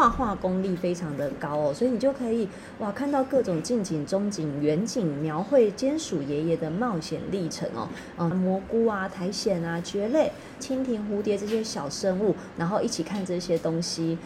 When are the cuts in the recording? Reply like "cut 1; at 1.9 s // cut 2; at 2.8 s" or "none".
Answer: cut 1; at 8.3 s // cut 2; at 10.6 s // cut 3; at 12.5 s